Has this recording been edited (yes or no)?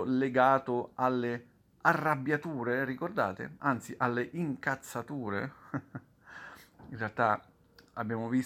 no